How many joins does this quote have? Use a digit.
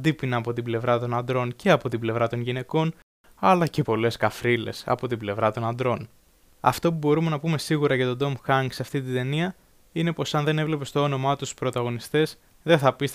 1